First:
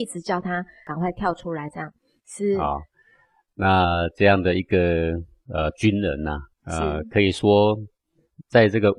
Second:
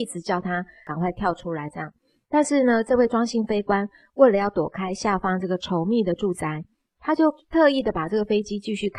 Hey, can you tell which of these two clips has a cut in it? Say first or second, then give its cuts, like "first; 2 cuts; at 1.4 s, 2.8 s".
first; 2 cuts; at 2.2 s, 6.5 s